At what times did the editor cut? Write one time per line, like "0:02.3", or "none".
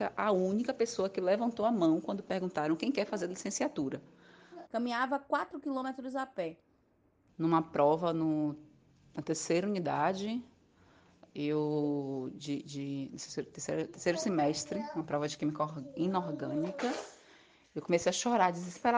0:04.7
0:07.3